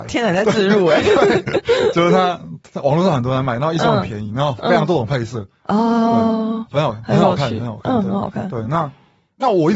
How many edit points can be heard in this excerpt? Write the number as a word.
zero